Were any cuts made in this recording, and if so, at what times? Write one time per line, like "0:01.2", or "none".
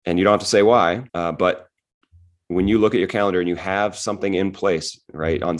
0:01.1